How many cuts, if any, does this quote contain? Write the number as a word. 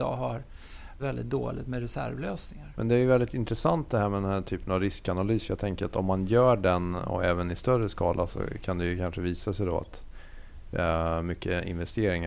two